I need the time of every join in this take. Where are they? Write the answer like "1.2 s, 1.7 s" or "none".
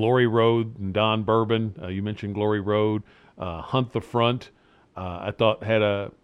none